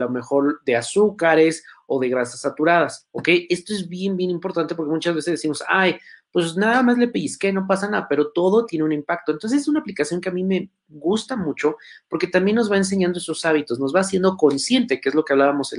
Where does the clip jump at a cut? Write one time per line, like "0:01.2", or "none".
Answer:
none